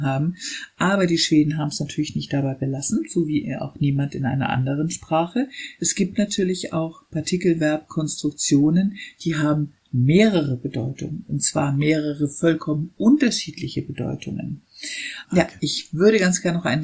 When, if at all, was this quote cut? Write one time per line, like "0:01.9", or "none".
0:15.2